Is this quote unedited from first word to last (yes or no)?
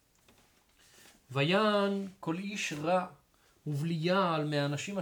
yes